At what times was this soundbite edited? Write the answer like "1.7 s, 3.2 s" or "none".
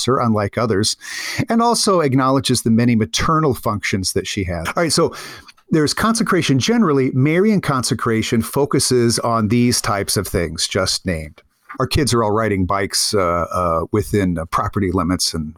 4.7 s, 11.8 s